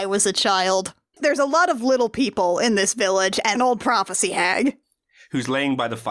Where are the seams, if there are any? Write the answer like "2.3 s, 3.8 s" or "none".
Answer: 1.1 s, 3.5 s